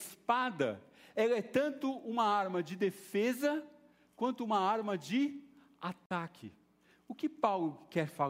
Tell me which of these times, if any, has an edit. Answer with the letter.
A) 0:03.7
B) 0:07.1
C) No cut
C